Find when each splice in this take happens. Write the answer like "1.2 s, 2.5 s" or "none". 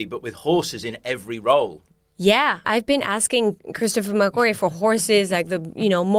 2.6 s